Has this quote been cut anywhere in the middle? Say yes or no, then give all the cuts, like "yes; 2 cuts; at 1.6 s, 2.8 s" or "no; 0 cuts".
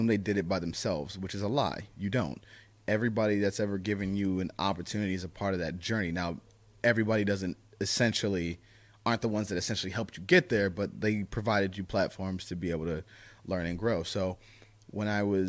no; 0 cuts